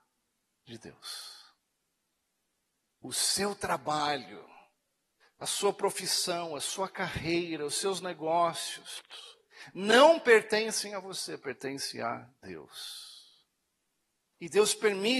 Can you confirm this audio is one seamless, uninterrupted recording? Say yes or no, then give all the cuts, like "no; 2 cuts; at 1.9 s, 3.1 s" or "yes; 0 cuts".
yes; 0 cuts